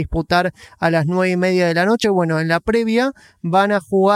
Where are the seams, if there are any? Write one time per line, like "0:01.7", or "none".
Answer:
none